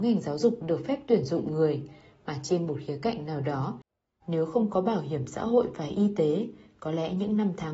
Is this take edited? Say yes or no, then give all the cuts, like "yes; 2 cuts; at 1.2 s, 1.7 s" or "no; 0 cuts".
yes; 1 cut; at 4.2 s